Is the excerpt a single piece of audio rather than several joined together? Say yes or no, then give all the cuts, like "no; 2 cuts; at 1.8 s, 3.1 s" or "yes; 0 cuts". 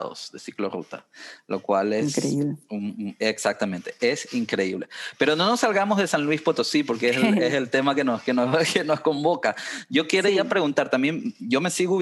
yes; 0 cuts